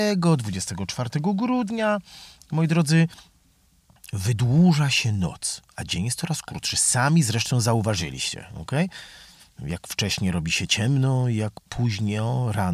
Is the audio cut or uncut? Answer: uncut